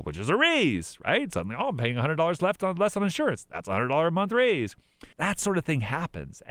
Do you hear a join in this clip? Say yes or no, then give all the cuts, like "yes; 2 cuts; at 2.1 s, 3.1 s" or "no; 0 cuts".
yes; 1 cut; at 5.1 s